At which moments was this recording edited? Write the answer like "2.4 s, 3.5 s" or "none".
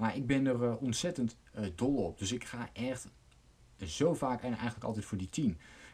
none